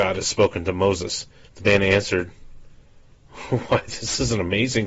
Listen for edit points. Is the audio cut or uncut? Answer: cut